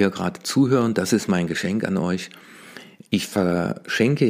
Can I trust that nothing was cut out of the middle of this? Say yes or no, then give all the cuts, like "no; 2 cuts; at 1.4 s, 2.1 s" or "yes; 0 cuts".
yes; 0 cuts